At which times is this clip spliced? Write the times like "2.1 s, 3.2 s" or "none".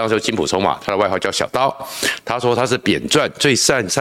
2.2 s